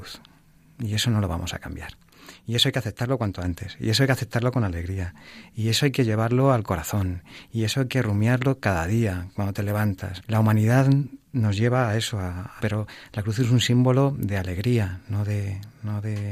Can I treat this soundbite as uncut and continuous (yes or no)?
no